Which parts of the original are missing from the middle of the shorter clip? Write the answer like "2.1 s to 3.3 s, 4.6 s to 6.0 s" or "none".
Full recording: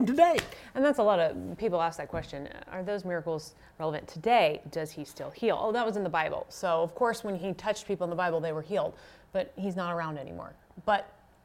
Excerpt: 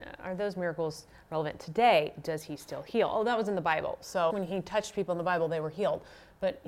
6.8 s to 7.2 s